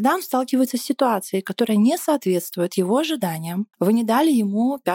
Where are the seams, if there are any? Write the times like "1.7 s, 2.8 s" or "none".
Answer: 3.7 s